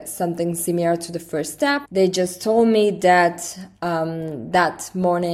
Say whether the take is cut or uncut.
cut